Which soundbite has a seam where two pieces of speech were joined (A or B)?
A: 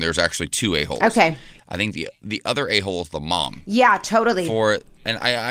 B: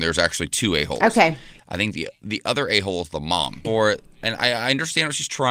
B